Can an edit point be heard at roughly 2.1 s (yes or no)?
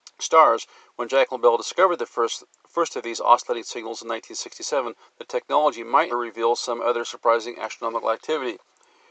no